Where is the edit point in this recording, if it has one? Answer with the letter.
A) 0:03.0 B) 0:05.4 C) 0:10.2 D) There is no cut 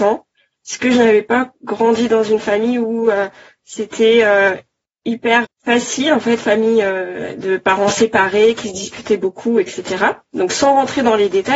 B